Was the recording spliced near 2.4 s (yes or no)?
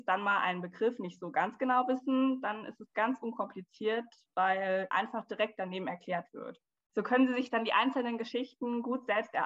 no